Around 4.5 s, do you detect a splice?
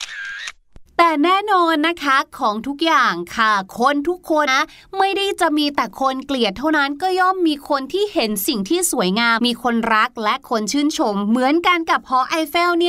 yes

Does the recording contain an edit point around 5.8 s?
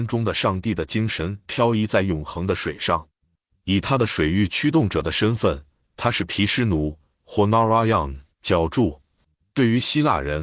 no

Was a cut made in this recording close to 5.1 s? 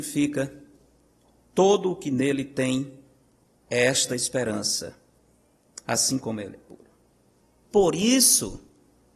no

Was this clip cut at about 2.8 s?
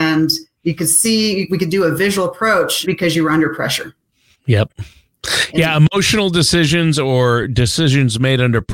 yes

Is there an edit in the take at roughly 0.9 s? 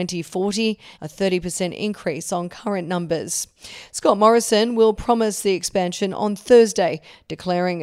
yes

